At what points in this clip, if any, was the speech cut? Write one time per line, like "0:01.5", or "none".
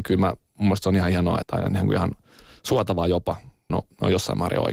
0:01.4
0:03.7